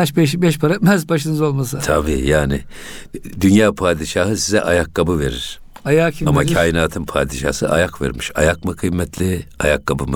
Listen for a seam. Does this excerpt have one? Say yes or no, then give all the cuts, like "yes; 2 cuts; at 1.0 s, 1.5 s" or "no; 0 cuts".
no; 0 cuts